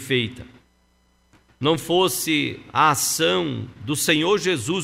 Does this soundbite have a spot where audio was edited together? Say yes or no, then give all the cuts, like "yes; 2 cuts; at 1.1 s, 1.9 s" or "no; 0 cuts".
yes; 1 cut; at 1.5 s